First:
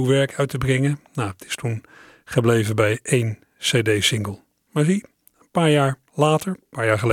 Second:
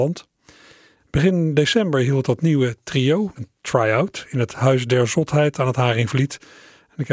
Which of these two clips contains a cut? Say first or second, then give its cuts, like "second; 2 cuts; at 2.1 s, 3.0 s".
second; 2 cuts; at 1.0 s, 3.4 s